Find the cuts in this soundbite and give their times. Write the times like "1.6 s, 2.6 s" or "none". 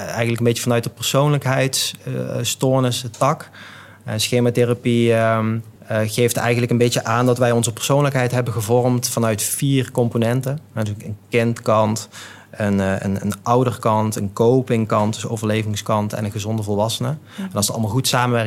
5.8 s

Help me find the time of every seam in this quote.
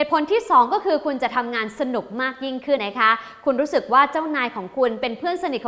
2.8 s

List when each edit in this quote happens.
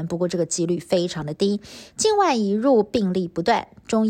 1.9 s

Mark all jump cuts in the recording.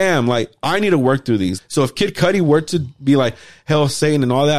1.6 s

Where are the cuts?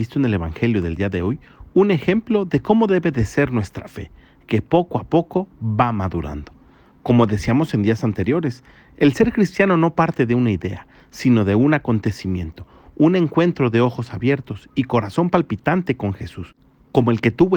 none

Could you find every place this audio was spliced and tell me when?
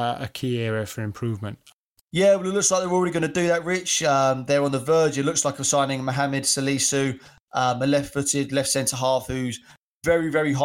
none

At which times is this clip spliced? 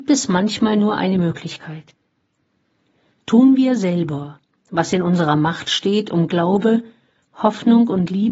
none

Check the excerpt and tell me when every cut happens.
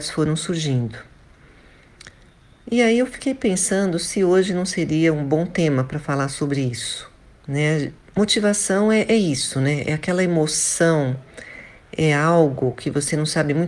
7.4 s

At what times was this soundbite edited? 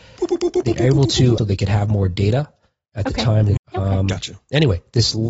1.4 s, 3.6 s

